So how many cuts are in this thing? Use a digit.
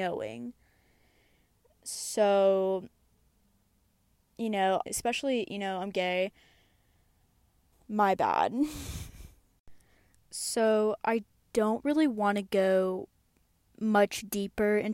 2